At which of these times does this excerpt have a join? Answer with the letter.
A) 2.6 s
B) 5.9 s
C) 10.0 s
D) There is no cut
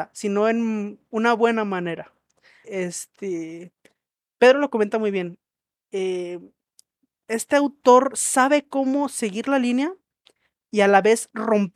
A